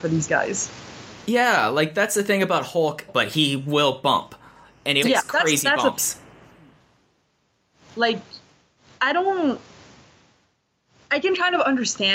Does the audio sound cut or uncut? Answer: cut